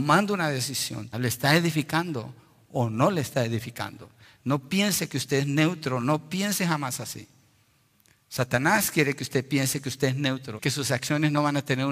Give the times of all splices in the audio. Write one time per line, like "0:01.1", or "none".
0:01.1
0:10.6